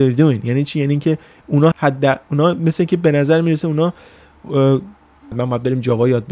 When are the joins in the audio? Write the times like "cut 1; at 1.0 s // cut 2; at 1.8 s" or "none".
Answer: cut 1; at 1.7 s // cut 2; at 5.3 s